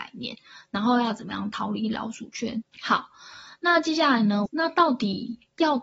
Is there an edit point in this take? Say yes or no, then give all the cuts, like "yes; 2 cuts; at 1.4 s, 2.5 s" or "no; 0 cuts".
yes; 2 cuts; at 2.6 s, 4.5 s